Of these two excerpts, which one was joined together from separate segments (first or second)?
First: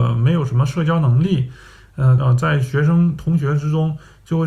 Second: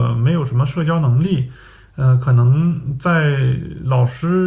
first